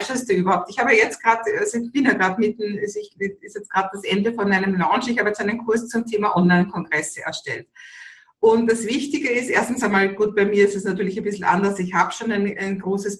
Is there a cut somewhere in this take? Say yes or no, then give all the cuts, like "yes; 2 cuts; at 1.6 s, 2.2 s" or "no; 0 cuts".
no; 0 cuts